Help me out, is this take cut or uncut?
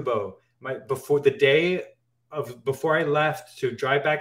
uncut